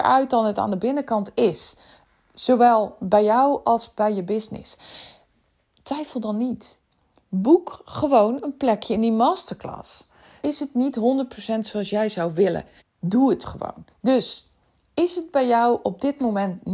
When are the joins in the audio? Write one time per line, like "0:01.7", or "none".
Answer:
0:10.4
0:12.8
0:13.9